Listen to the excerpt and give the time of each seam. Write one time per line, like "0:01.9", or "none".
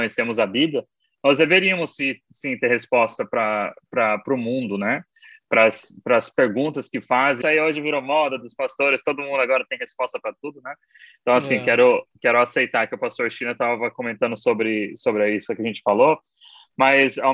0:07.4